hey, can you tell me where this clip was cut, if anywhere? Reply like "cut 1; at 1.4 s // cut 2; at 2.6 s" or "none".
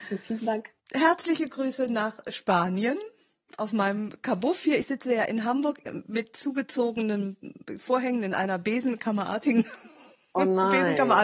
none